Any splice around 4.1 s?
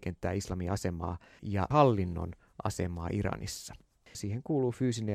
yes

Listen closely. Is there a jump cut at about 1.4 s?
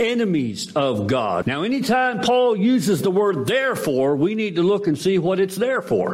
yes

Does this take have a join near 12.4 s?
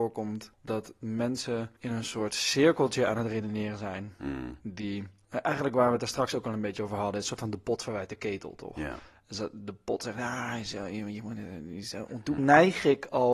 yes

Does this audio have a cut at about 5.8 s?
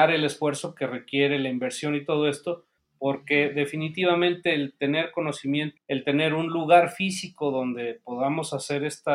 yes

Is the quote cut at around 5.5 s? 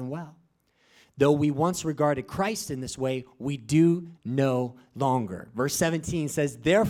no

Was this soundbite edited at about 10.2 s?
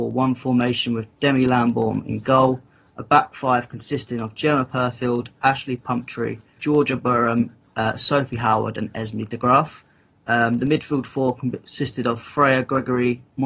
no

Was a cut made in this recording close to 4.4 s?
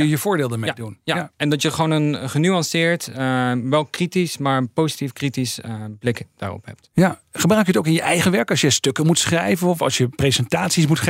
no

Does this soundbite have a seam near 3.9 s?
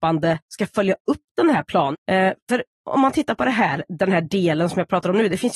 no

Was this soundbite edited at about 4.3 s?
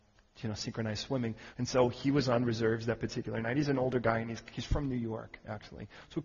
no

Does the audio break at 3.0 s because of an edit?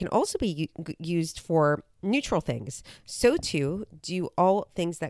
yes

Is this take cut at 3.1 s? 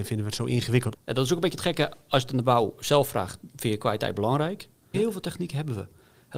no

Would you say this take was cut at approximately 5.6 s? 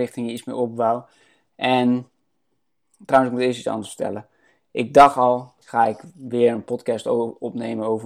yes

